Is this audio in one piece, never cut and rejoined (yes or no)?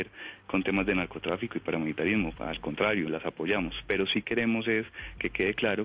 yes